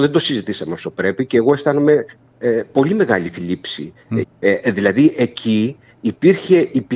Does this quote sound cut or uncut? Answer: cut